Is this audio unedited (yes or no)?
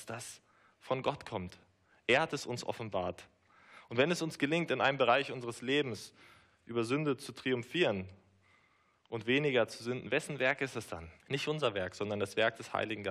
no